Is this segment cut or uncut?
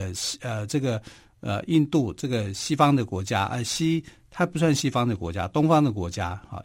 uncut